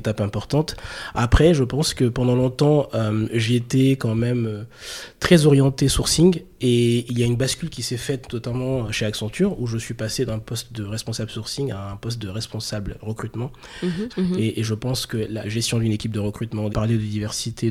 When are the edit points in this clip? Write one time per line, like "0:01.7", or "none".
0:14.1
0:15.4
0:16.7